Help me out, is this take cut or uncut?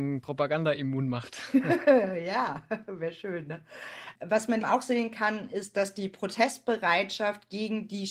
cut